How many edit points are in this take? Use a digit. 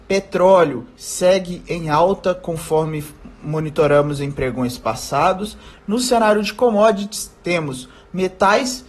1